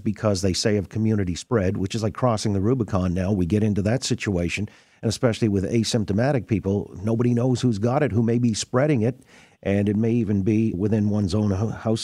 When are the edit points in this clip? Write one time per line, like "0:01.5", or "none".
0:10.7